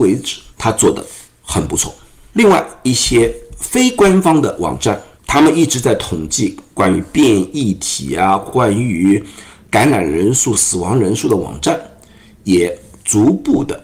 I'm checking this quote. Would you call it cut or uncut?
uncut